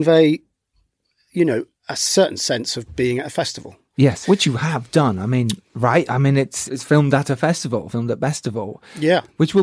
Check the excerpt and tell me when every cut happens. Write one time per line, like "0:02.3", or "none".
0:04.2
0:06.7

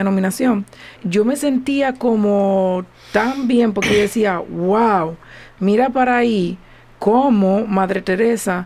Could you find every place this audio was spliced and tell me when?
0:01.0

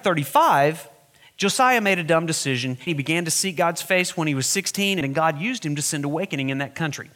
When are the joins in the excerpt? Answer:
0:02.9
0:05.0

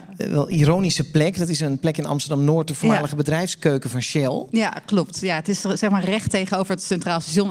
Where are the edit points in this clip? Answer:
none

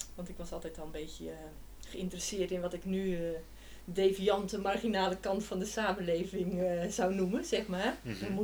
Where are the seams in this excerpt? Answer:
none

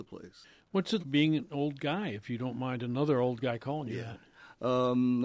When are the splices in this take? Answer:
0:01.0

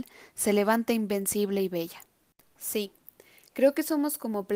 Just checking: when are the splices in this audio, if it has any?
none

